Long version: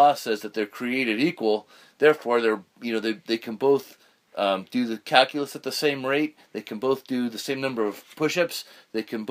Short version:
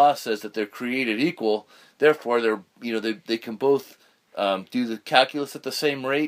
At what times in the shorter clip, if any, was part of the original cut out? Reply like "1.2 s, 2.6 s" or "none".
none